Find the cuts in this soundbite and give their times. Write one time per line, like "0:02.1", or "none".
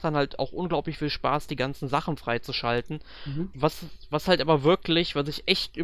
0:03.5